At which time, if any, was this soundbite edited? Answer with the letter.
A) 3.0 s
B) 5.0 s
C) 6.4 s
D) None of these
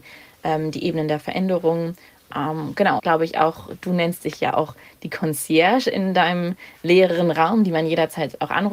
A